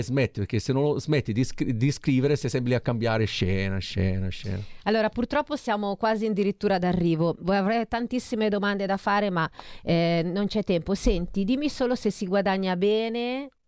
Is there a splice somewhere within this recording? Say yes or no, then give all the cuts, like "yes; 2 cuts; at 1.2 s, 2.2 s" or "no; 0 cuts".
no; 0 cuts